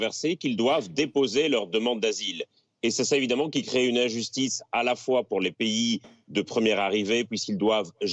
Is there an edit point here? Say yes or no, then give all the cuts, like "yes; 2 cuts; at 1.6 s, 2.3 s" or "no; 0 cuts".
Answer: no; 0 cuts